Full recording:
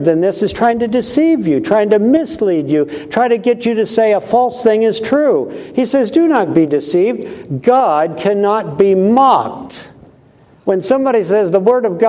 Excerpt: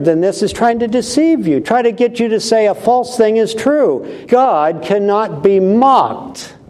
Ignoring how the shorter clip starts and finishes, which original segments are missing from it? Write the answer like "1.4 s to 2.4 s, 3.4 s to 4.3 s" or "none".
1.6 s to 3.1 s, 5.7 s to 7.6 s